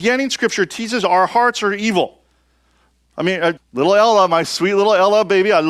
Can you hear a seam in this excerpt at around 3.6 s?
yes; 1 cut; at 3.6 s

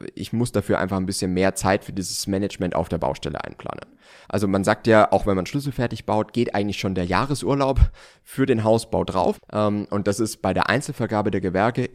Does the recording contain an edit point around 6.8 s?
no; 2 cuts; at 4.2 s, 9.3 s

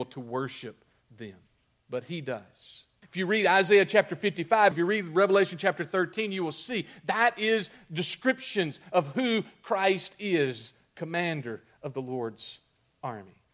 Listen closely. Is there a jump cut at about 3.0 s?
yes; 2 cuts; at 3.0 s, 4.7 s

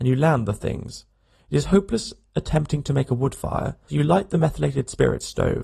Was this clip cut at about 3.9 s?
yes; 1 cut; at 3.9 s

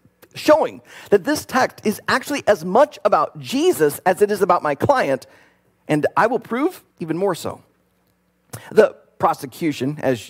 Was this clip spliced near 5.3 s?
no; 1 cut; at 6.9 s

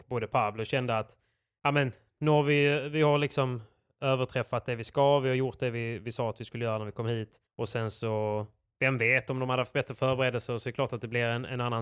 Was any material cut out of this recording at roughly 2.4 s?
no; 0 cuts

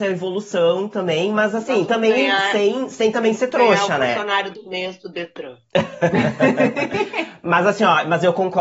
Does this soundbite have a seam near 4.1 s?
no; 0 cuts

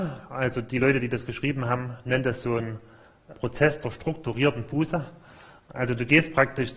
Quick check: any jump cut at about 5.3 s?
no; 1 cut; at 3.3 s

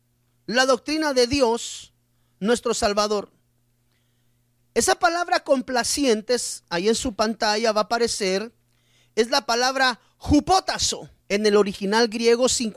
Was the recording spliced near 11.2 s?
yes; 1 cut; at 11.2 s

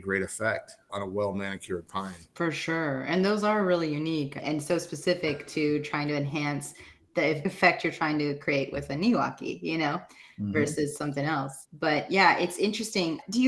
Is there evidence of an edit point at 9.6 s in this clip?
no; 1 cut; at 2.3 s

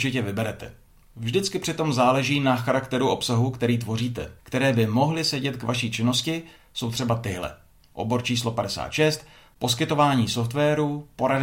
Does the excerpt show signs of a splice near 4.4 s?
yes; 1 cut; at 4.4 s

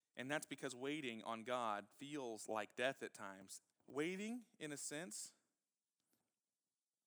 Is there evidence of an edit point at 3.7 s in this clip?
yes; 1 cut; at 3.7 s

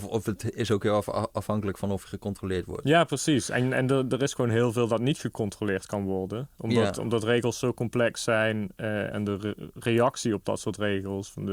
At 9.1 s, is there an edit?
yes; 1 cut; at 9.1 s

